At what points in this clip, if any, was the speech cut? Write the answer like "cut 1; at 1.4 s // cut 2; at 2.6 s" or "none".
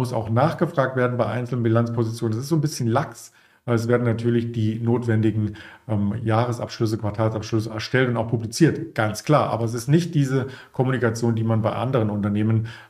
none